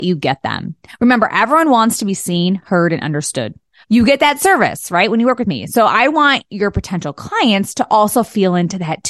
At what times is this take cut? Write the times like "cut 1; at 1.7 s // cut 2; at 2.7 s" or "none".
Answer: cut 1; at 3.8 s